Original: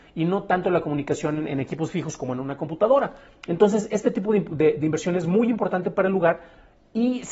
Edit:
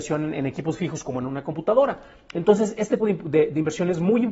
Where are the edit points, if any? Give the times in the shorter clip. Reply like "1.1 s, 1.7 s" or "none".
3.0 s